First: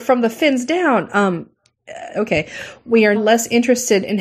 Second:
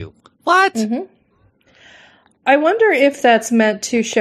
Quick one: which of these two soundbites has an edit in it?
first; 2 cuts; at 2.1 s, 3.2 s

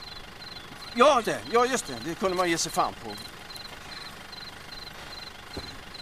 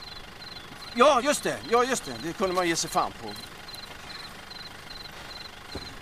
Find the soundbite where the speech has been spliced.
first; 1 cut; at 1.2 s

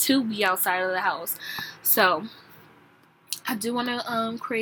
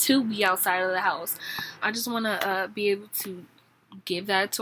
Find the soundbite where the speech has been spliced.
second; 1 cut; at 1.8 s

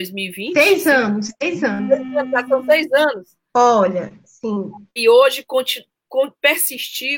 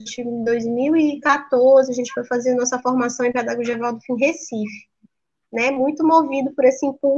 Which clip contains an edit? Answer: first; 2 cuts; at 3.5 s, 5.0 s

